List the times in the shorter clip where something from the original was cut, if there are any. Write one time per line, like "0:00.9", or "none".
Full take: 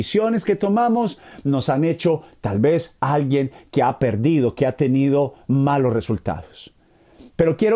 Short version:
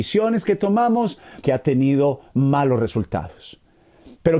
0:01.4